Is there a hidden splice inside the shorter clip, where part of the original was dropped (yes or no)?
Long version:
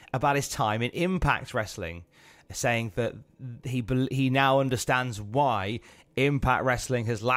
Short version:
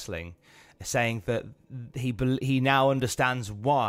no